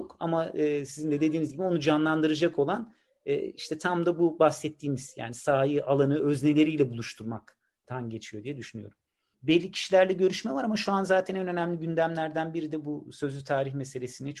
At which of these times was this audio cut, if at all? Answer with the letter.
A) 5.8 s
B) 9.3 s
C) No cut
B